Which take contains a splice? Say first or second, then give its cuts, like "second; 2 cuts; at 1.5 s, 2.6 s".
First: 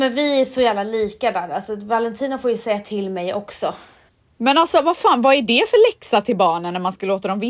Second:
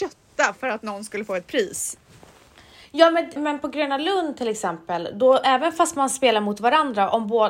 second; 1 cut; at 3.4 s